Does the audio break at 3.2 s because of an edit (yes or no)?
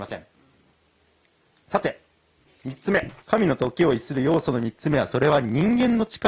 yes